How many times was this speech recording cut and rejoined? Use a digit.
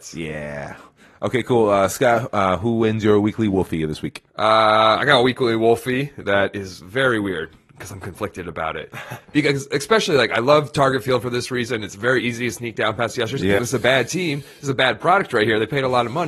2